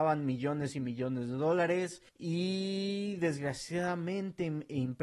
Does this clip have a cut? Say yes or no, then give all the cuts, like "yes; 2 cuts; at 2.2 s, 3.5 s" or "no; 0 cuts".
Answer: yes; 1 cut; at 2.1 s